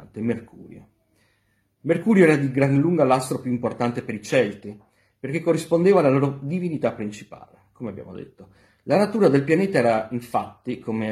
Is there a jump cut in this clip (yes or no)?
no